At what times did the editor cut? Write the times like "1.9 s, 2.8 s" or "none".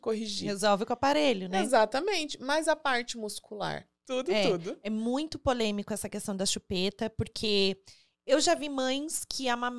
3.9 s